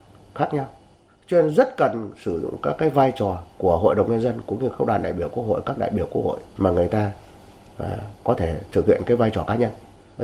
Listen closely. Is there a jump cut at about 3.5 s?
yes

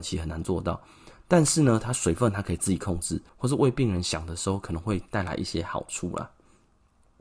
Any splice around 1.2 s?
no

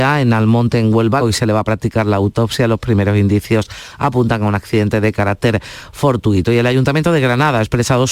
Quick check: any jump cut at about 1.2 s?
yes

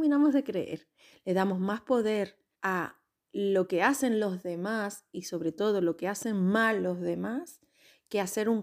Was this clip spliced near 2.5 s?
yes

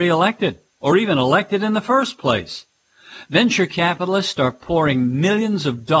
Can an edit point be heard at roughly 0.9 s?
no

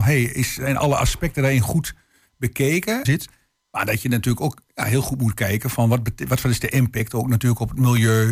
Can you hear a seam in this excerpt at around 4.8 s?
no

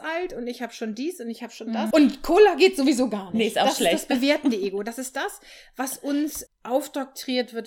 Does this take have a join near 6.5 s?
yes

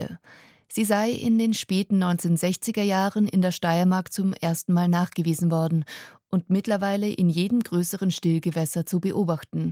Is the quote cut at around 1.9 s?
no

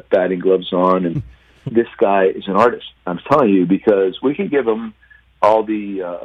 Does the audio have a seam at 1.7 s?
yes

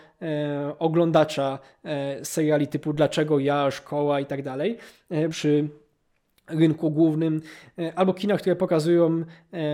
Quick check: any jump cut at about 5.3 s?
yes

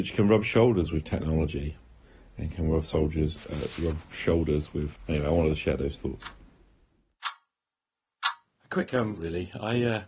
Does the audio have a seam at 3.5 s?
no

